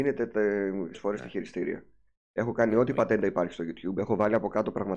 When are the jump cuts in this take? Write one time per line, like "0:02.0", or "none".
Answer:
0:00.9